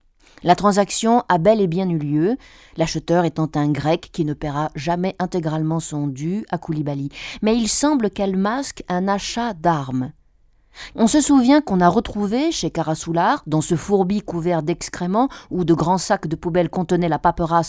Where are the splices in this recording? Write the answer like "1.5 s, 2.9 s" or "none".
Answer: 10.9 s